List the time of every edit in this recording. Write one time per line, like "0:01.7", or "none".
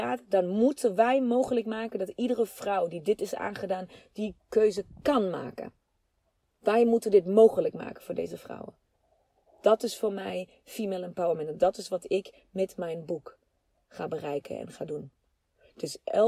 none